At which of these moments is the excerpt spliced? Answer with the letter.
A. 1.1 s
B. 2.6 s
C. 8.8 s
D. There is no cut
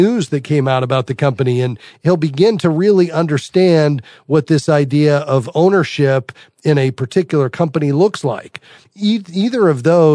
C